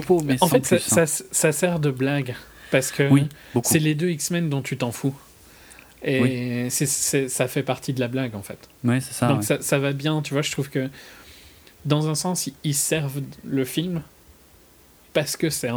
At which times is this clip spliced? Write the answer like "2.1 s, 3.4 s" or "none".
none